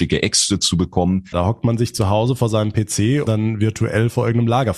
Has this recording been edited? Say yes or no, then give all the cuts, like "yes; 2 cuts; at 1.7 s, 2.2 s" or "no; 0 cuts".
yes; 2 cuts; at 1.3 s, 3.3 s